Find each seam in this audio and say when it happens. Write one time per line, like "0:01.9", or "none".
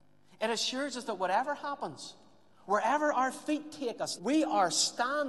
0:02.6
0:04.2